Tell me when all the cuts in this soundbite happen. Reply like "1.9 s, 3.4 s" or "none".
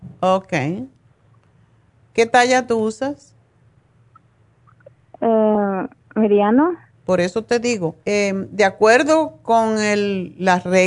6.9 s, 8.0 s